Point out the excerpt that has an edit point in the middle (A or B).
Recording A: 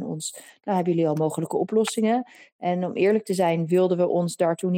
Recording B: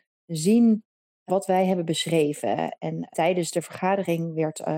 B